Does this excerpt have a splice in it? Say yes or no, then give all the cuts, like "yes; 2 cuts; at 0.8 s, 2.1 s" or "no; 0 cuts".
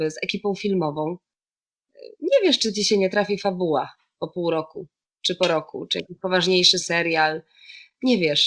no; 0 cuts